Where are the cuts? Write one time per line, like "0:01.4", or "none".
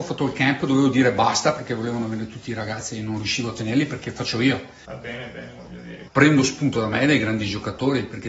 0:04.8
0:06.1